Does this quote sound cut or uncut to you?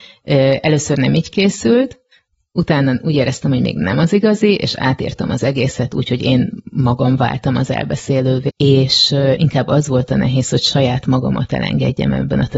cut